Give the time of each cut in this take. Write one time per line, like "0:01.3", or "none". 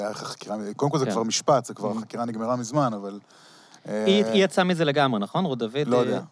none